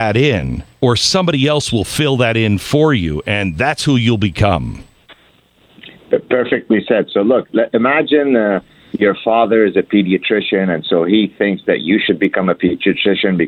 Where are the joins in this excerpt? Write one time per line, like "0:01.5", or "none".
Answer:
none